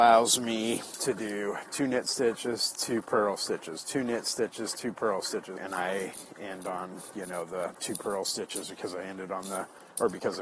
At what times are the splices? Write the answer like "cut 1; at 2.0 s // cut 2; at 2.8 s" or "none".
cut 1; at 5.6 s

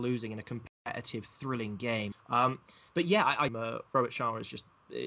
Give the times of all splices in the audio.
cut 1; at 2.1 s // cut 2; at 3.5 s

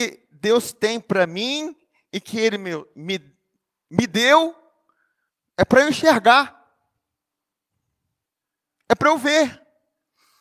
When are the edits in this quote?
none

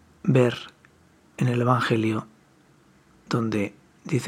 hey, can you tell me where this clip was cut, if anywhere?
none

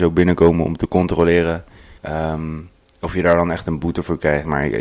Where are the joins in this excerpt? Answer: cut 1; at 2.0 s

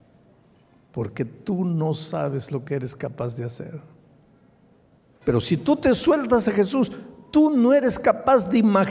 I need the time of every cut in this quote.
cut 1; at 5.2 s

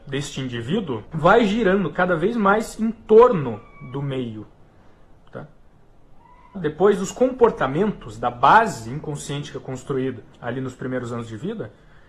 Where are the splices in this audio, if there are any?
cut 1; at 1.0 s // cut 2; at 6.5 s // cut 3; at 10.3 s

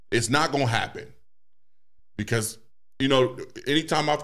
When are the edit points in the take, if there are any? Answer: none

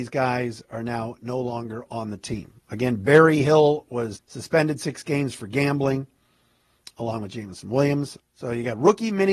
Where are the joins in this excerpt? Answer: cut 1; at 4.2 s // cut 2; at 8.2 s

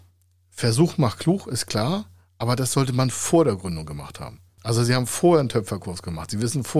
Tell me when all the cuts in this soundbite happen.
none

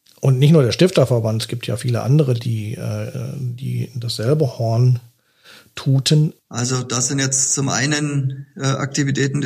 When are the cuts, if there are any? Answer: cut 1; at 6.4 s

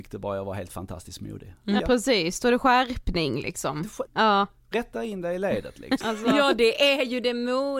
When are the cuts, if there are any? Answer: cut 1; at 1.8 s // cut 2; at 4.1 s // cut 3; at 6.0 s

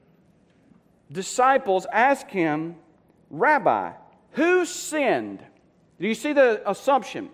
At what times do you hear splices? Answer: none

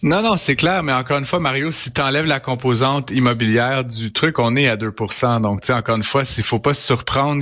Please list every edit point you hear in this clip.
none

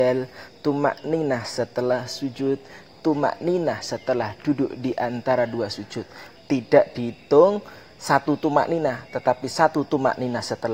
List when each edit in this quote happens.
cut 1; at 6.3 s

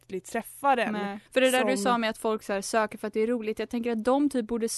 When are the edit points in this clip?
cut 1; at 1.3 s

